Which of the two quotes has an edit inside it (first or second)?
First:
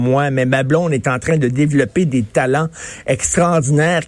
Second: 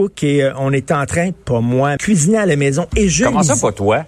second